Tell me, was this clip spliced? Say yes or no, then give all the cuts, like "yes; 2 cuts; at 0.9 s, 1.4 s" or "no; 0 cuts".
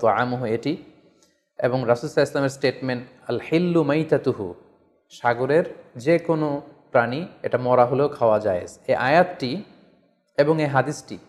no; 0 cuts